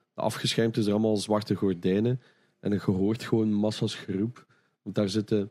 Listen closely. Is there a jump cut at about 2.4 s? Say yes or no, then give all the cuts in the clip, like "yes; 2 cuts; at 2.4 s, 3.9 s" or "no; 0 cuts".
no; 0 cuts